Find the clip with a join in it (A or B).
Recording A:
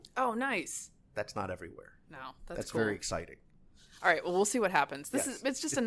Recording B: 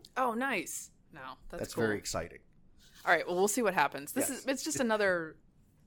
B